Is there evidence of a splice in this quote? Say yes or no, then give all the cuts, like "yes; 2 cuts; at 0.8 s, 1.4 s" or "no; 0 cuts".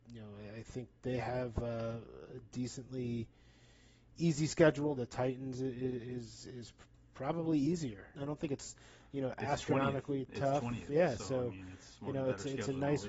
yes; 3 cuts; at 1.0 s, 5.0 s, 8.1 s